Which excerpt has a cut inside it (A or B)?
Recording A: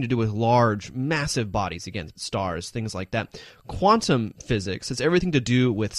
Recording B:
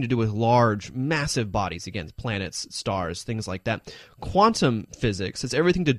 A